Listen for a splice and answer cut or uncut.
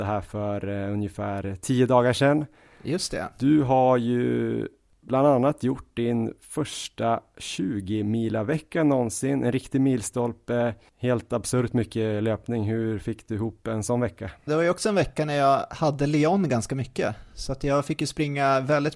cut